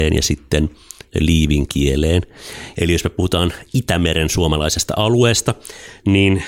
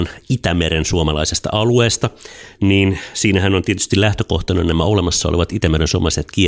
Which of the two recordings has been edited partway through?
first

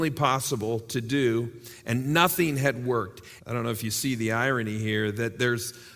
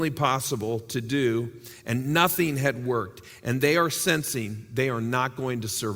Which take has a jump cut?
first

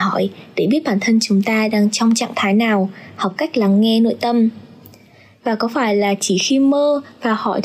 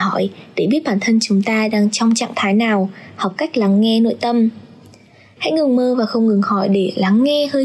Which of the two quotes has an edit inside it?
second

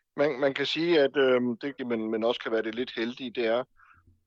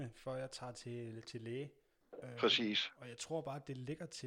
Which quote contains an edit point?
first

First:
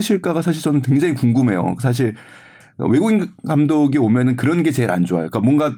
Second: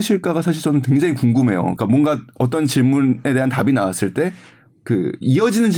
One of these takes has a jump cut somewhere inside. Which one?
second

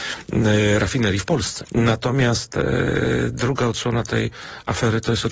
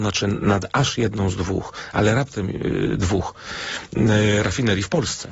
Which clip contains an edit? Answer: first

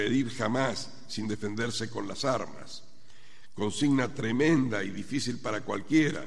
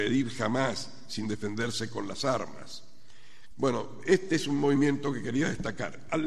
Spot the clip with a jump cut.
second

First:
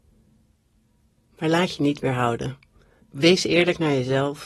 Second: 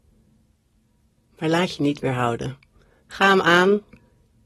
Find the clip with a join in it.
first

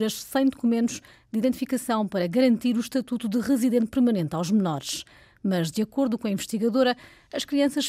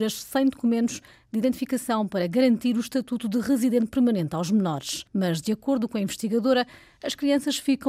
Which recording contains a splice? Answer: second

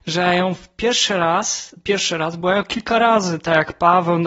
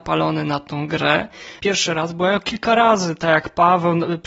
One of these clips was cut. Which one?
second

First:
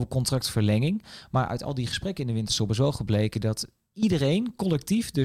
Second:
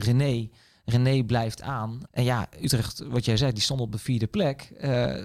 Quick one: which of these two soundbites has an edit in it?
second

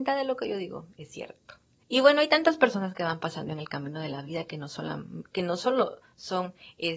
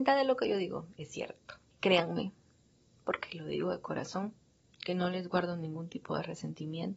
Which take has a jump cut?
second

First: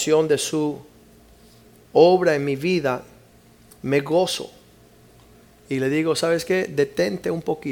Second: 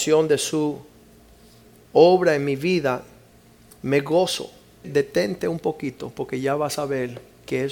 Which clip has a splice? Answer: second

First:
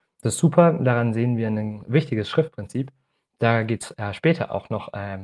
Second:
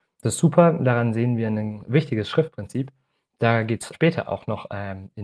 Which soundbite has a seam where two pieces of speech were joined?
second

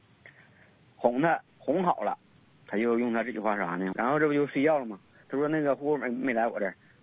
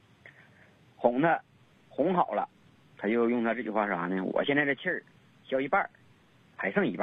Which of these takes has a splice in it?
first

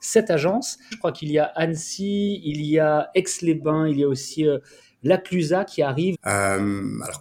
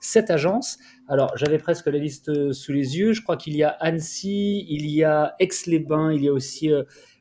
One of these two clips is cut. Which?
first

